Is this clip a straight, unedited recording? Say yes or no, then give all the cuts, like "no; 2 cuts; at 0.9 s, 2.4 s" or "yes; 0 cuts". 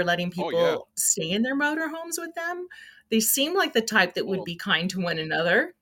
yes; 0 cuts